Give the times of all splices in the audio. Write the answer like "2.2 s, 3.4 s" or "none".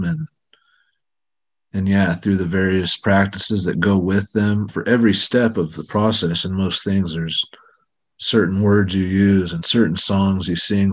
4.7 s